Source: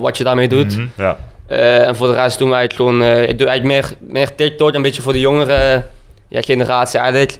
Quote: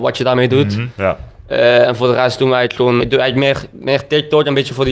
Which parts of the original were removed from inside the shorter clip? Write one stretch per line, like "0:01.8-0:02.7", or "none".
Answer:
0:03.0-0:03.3

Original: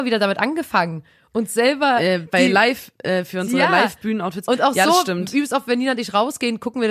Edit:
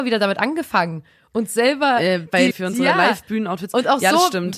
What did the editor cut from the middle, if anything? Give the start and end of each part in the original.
0:02.5-0:03.2

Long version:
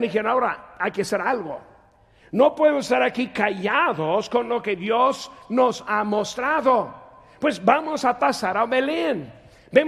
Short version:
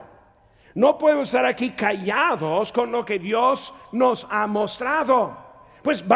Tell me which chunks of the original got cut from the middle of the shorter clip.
none

